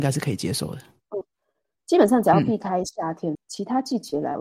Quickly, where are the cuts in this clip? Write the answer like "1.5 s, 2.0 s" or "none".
1.2 s, 3.3 s